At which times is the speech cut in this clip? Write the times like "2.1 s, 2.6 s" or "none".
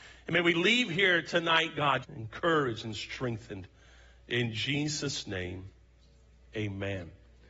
2.0 s